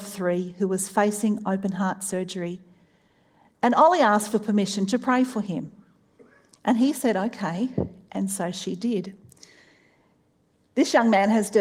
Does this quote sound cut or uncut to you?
uncut